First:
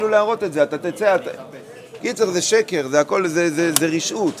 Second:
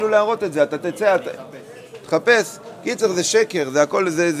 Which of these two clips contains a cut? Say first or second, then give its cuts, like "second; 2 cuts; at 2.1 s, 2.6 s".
first; 1 cut; at 2.0 s